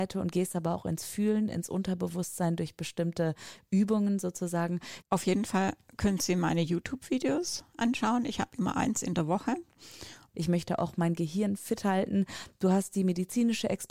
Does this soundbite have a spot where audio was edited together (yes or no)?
yes